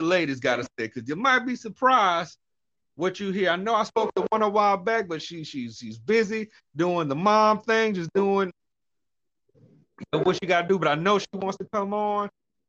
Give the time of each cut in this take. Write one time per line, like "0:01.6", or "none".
none